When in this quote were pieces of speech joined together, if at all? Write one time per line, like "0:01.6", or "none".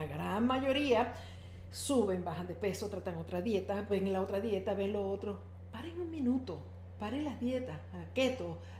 0:03.9